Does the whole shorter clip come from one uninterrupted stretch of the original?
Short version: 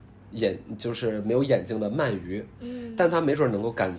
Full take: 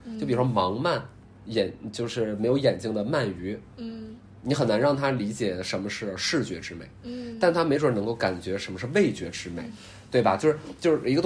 no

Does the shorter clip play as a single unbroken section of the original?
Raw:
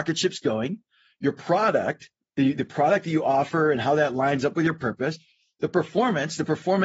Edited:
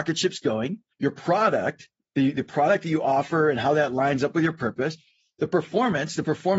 no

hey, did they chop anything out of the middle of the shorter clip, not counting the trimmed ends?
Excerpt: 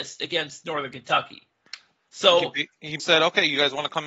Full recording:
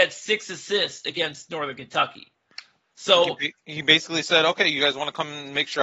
yes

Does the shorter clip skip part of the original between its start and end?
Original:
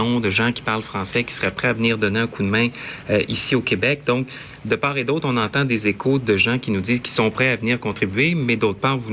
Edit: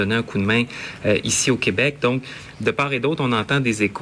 no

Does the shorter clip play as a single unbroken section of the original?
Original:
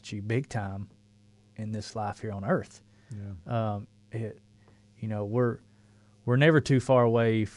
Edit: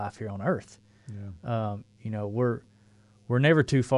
no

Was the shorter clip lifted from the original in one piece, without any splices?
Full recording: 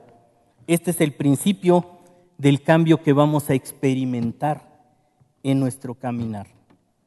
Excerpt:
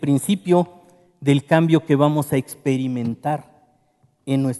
yes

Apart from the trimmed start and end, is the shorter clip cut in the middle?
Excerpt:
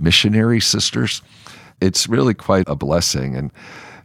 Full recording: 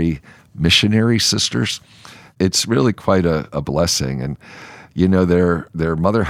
yes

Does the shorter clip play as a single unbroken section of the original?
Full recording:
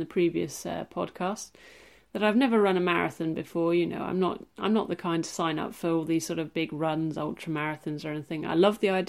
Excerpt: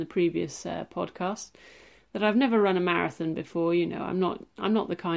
yes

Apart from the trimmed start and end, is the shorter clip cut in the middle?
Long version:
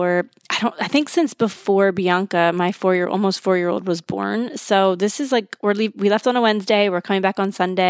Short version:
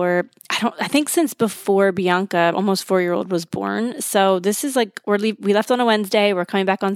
yes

